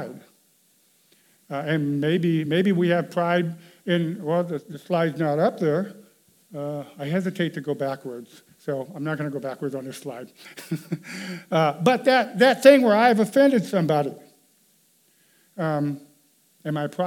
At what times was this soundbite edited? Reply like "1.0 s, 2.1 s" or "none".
none